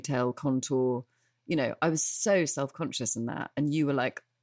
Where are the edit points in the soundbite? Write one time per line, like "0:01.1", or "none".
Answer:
none